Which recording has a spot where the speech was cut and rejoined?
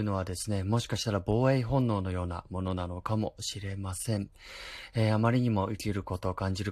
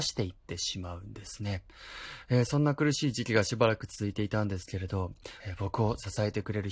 second; 2 cuts; at 2.3 s, 5.4 s

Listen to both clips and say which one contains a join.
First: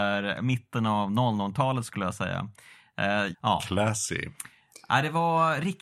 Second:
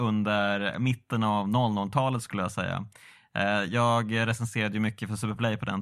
first; 1 cut; at 3.3 s

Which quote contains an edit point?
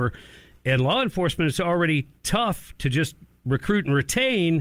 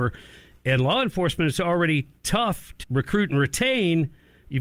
second; 1 cut; at 2.8 s

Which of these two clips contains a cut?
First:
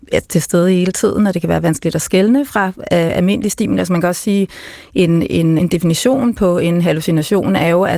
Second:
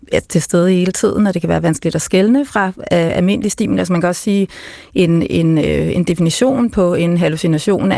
first; 1 cut; at 5.6 s

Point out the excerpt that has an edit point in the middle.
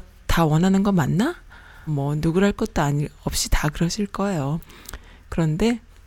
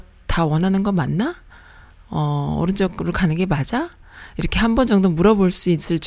first; 1 cut; at 1.9 s

